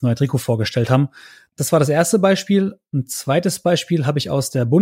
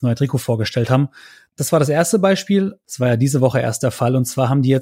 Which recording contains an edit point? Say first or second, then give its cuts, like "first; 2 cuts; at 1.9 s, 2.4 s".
second; 1 cut; at 2.8 s